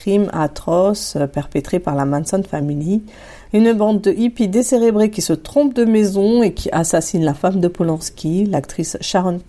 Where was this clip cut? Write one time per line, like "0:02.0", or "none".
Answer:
none